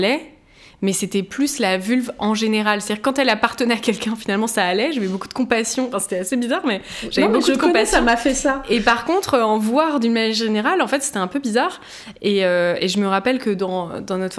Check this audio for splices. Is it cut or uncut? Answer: uncut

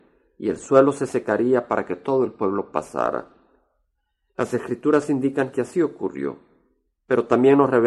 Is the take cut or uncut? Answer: uncut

